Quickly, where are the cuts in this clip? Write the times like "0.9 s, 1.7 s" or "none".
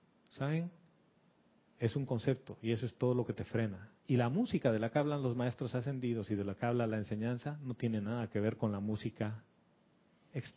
4.0 s